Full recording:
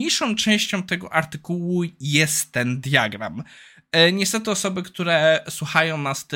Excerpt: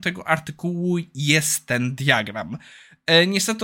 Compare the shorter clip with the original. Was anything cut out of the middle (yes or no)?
no